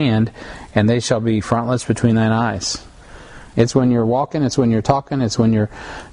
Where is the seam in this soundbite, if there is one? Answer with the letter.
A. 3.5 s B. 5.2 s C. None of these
A